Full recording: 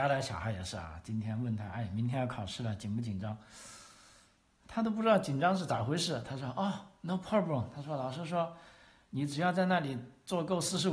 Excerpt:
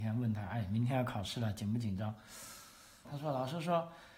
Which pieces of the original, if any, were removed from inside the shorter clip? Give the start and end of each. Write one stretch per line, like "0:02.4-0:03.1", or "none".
0:04.3-0:07.7